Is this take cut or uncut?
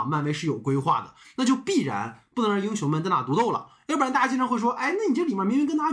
uncut